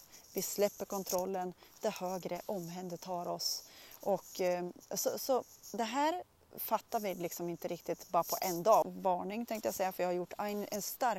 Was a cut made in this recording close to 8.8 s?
yes; 1 cut; at 8.8 s

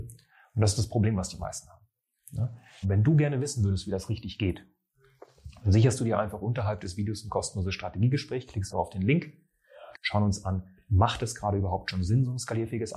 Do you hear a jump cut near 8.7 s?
yes; 3 cuts; at 2.8 s, 8.7 s, 9.9 s

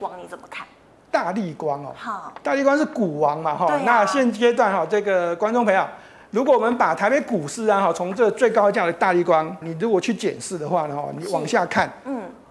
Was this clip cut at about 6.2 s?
no; 1 cut; at 9.6 s

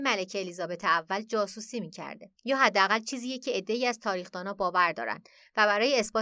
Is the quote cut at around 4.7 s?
no; 1 cut; at 2.3 s

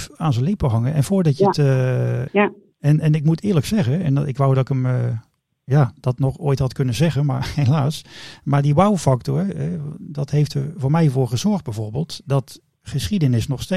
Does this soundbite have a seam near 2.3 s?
yes; 1 cut; at 2.3 s

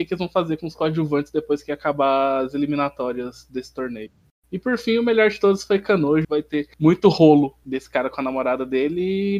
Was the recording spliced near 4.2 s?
no; 1 cut; at 6.2 s

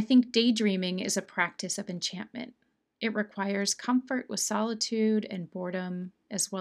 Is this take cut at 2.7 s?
no; 0 cuts

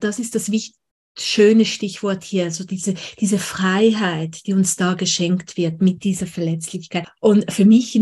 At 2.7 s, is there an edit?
no; 1 cut; at 7.0 s

